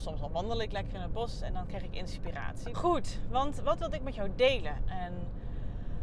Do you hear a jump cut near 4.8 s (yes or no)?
yes